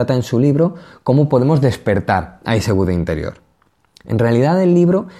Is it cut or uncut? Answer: uncut